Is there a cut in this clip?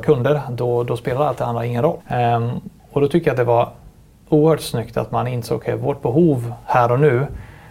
yes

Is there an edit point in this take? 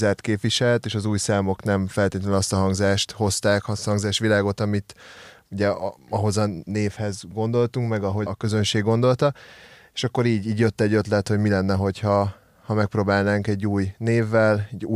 yes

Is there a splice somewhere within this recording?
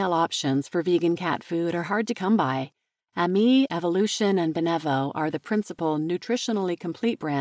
no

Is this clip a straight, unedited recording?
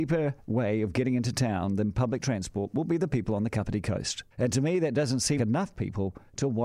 no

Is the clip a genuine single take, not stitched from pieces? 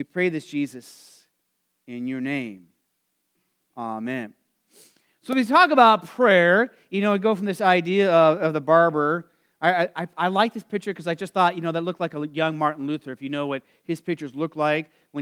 yes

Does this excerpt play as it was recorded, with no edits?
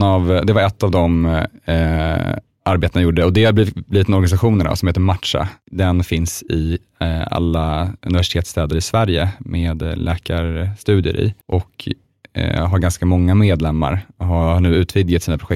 no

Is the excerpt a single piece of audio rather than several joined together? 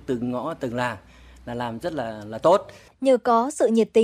yes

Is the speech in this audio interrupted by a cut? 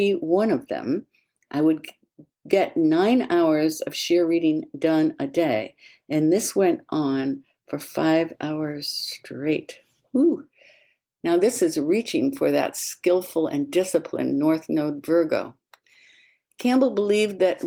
no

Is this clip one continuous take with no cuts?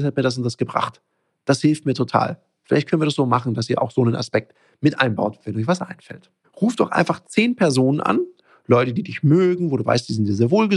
no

